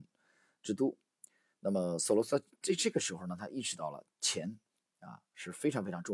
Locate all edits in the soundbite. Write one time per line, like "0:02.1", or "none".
none

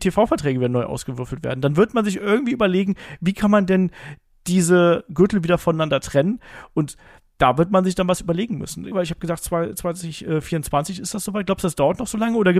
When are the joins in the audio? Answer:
0:08.9

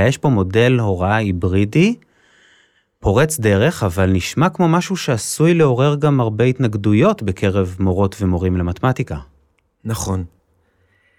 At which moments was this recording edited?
none

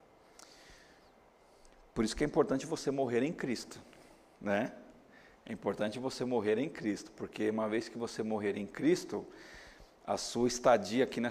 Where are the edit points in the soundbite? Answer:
none

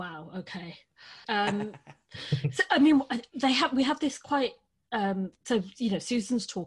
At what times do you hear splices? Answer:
0:01.2

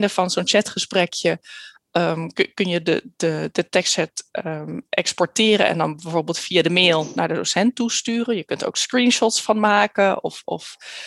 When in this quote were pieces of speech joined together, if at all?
none

